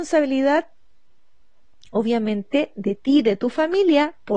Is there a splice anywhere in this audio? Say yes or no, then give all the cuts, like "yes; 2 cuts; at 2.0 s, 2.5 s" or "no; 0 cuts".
no; 0 cuts